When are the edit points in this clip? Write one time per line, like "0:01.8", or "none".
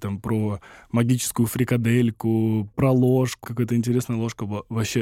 0:03.4